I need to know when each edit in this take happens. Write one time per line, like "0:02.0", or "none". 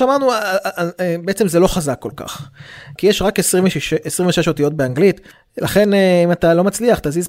0:03.0